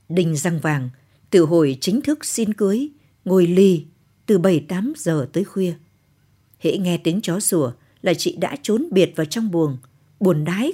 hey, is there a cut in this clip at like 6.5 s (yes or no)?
yes